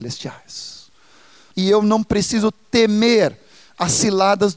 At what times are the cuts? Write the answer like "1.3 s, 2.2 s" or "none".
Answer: 1.5 s